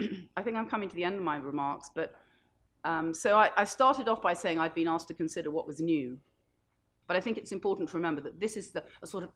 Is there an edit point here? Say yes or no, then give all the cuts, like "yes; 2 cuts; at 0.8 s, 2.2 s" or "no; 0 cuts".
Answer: yes; 1 cut; at 7.0 s